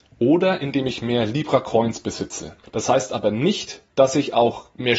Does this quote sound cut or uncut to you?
cut